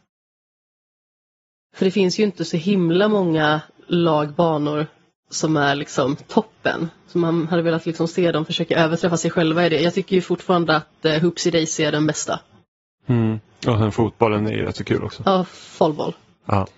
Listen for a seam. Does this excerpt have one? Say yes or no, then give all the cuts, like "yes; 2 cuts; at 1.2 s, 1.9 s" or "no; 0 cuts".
no; 0 cuts